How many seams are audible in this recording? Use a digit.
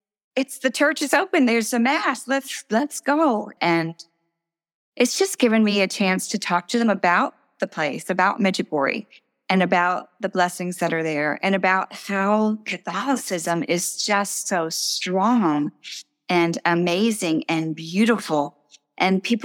1